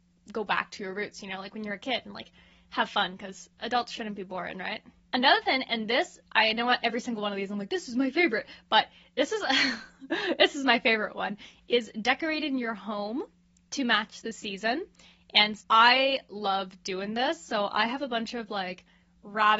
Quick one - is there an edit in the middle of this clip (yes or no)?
yes